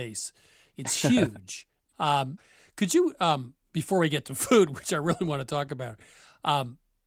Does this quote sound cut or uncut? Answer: uncut